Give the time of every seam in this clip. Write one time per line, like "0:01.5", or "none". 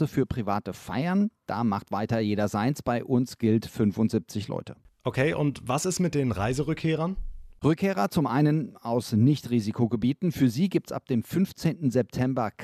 none